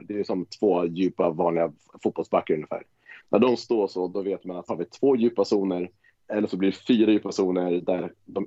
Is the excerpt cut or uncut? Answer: cut